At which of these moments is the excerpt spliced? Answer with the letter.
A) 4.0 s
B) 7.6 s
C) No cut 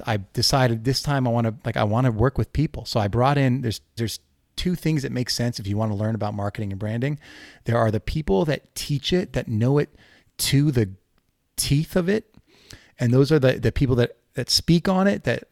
A